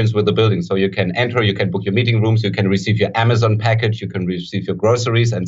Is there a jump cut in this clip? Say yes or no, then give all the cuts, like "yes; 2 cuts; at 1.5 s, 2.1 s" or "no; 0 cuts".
no; 0 cuts